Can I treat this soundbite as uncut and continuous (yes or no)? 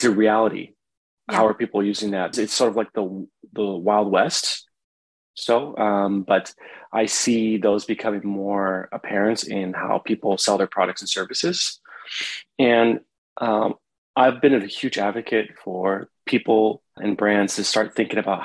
no